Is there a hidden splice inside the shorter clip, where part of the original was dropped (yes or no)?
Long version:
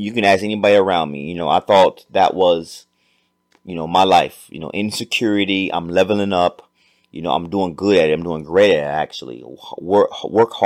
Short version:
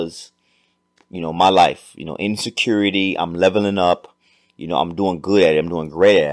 no